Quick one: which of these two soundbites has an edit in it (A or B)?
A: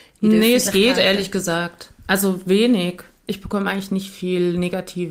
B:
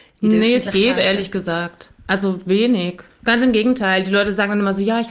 B